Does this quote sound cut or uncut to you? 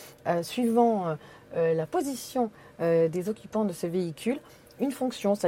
uncut